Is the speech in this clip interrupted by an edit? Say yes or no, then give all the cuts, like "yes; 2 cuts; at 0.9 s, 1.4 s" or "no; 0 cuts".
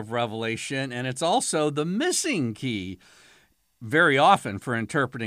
no; 0 cuts